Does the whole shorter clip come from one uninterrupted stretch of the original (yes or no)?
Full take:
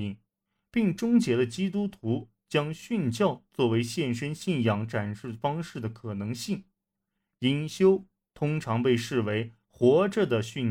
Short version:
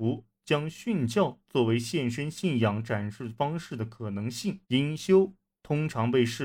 no